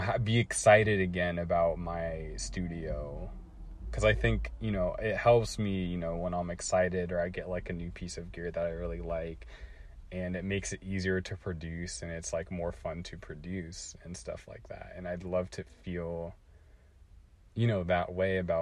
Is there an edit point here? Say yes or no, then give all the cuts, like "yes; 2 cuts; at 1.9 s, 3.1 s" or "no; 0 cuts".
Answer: no; 0 cuts